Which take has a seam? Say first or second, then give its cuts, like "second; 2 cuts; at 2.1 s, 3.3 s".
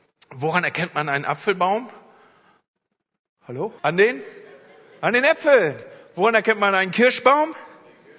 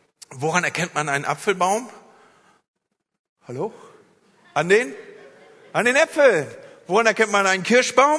first; 1 cut; at 3.8 s